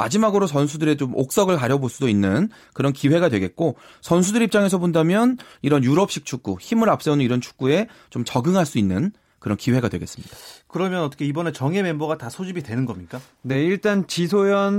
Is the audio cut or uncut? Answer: uncut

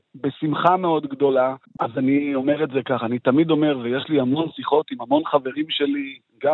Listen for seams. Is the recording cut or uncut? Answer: cut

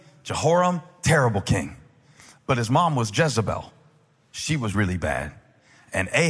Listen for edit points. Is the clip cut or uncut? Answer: cut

